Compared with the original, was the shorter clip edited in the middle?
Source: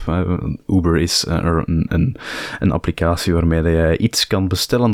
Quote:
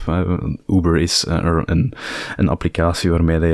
yes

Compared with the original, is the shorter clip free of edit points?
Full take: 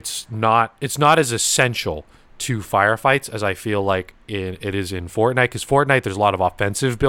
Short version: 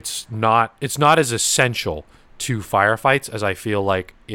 yes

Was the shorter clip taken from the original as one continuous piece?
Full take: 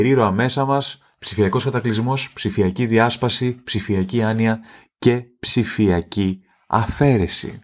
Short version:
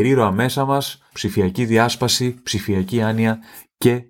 no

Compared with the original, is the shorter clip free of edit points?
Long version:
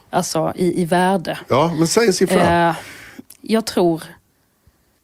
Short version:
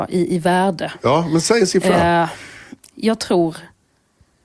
yes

